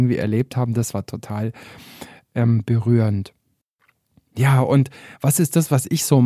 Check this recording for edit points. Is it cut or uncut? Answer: uncut